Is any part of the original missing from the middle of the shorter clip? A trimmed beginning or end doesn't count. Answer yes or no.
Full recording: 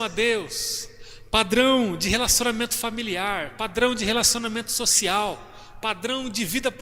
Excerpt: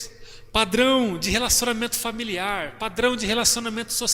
no